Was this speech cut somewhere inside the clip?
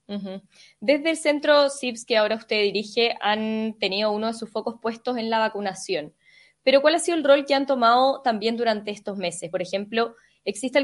no; 0 cuts

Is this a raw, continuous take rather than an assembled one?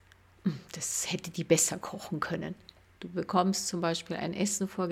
no; 1 cut; at 3.0 s

